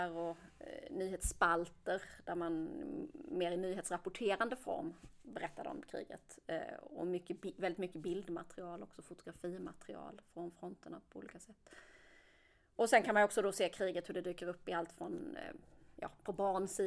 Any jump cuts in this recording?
no; 0 cuts

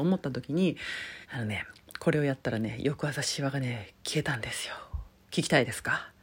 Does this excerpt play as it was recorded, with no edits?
no; 1 cut; at 1.2 s

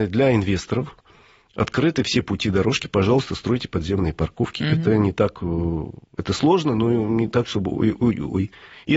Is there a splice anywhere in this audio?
no; 0 cuts

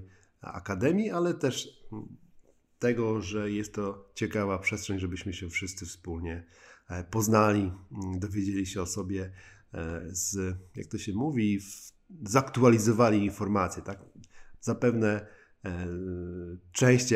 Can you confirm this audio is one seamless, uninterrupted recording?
yes; 0 cuts

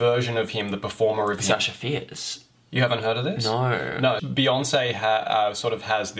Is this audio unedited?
no; 1 cut; at 4.2 s

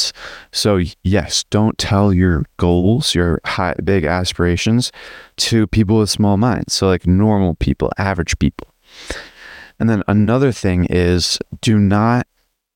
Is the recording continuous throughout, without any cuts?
yes; 0 cuts

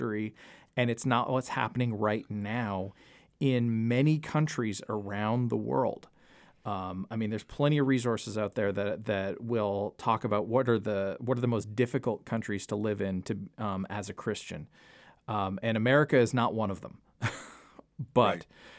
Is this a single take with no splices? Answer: yes; 0 cuts

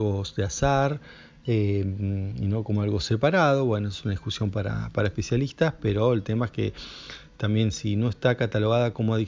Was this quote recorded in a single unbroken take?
yes; 0 cuts

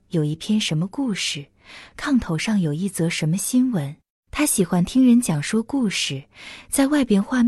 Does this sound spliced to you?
yes; 1 cut; at 4.1 s

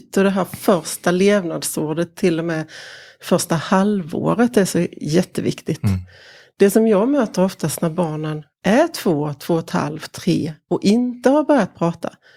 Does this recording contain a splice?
no; 0 cuts

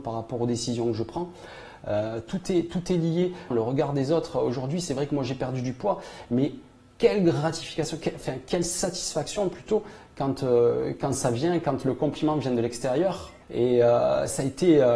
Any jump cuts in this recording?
yes; 2 cuts; at 3.5 s, 13.4 s

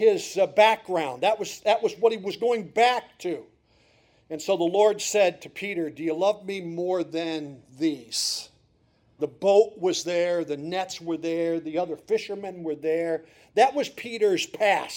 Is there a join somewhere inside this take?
yes; 1 cut; at 9.2 s

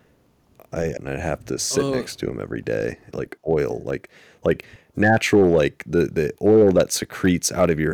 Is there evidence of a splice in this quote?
yes; 2 cuts; at 1.0 s, 3.1 s

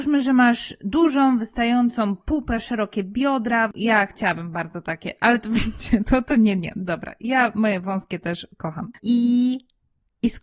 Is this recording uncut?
yes; 0 cuts

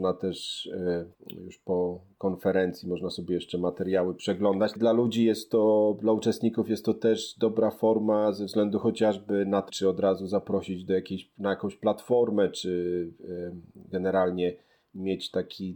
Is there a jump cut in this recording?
yes; 3 cuts; at 1.1 s, 4.8 s, 9.7 s

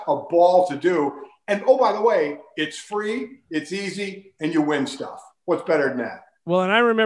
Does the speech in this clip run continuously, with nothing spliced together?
yes; 0 cuts

